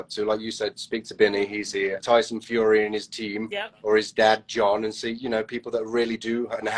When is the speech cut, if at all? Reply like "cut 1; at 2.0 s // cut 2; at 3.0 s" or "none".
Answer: cut 1; at 2.0 s